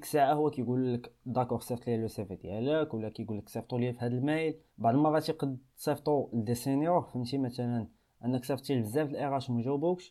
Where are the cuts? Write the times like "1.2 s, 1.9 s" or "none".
4.7 s